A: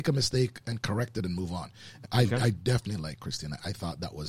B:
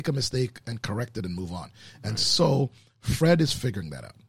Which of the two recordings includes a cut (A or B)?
A